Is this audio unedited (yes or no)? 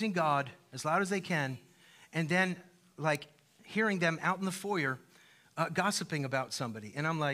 yes